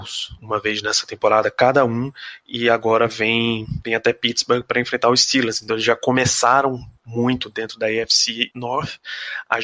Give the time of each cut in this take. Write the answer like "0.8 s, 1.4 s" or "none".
none